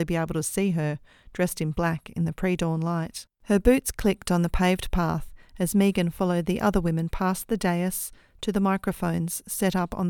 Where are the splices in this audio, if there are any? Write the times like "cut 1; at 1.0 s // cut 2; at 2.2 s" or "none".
cut 1; at 3.3 s